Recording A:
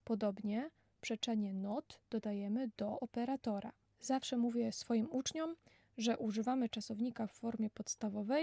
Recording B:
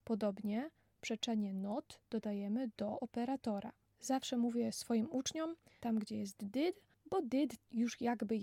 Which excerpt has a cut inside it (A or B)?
B